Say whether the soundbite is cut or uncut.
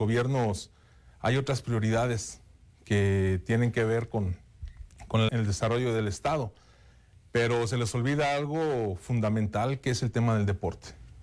cut